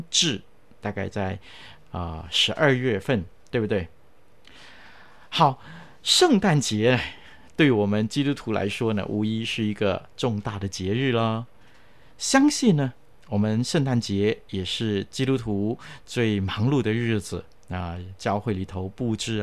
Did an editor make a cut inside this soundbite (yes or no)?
no